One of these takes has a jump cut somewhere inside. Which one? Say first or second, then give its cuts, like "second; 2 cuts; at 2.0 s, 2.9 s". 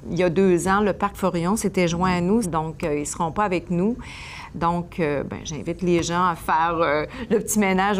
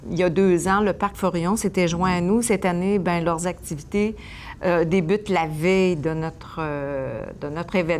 first; 2 cuts; at 2.4 s, 4.5 s